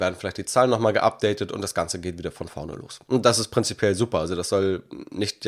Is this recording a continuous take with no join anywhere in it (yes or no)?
yes